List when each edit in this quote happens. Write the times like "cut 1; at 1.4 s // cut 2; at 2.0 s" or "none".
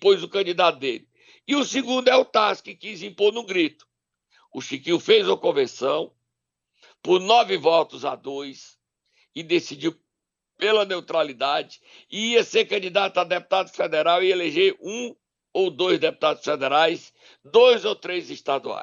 none